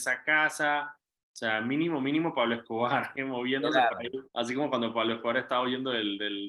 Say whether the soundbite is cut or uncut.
cut